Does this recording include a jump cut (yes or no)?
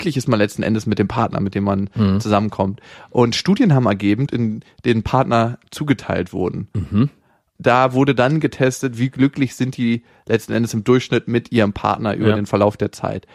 yes